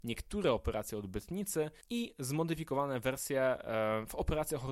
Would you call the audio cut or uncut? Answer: cut